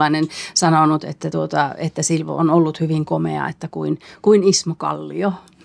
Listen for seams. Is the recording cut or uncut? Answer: uncut